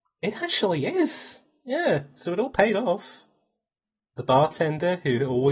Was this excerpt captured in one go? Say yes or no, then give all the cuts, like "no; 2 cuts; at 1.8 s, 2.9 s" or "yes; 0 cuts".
yes; 0 cuts